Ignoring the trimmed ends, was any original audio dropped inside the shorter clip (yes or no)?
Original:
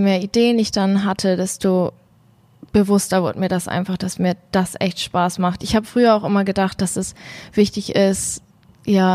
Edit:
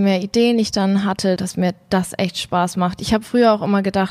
yes